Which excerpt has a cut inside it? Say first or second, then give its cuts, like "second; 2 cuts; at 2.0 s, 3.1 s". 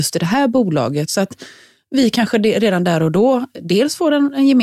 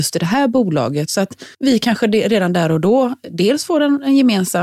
second; 1 cut; at 1.5 s